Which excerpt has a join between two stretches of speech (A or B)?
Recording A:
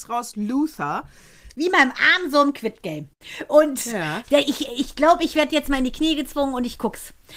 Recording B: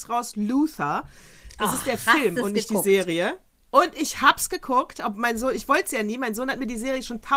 A